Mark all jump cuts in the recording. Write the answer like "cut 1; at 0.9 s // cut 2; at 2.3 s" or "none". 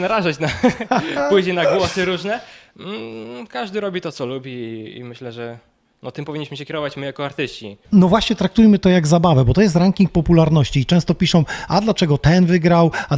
cut 1; at 7.8 s